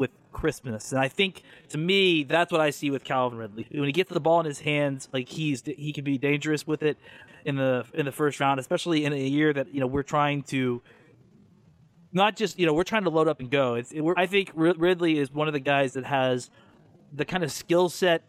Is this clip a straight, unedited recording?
no; 3 cuts; at 3.6 s, 7.3 s, 14.2 s

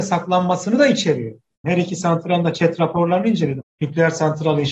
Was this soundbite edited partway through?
yes; 2 cuts; at 1.6 s, 3.6 s

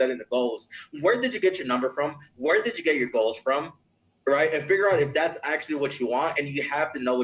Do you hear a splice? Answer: yes; 1 cut; at 6.3 s

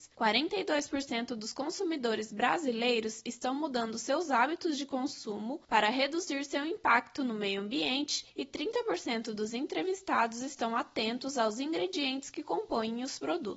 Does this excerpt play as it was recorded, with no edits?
yes; 0 cuts

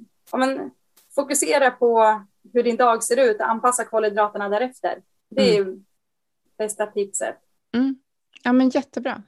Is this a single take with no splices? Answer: yes; 0 cuts

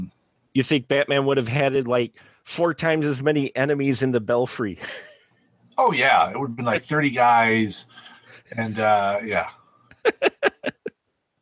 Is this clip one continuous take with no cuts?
yes; 0 cuts

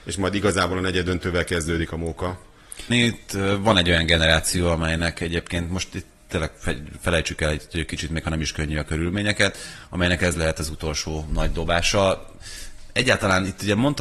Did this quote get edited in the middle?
yes; 1 cut; at 2.9 s

